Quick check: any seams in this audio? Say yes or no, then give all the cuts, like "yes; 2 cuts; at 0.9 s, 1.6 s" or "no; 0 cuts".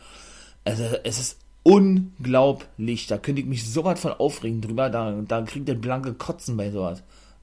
no; 0 cuts